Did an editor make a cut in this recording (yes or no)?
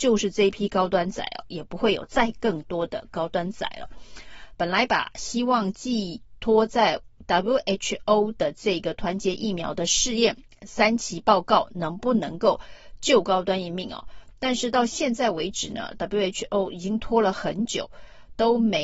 yes